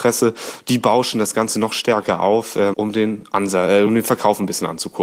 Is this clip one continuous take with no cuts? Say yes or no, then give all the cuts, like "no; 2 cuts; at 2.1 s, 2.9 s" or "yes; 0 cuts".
no; 2 cuts; at 2.7 s, 3.9 s